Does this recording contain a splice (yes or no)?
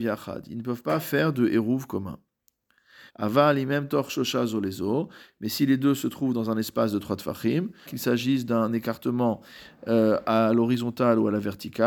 yes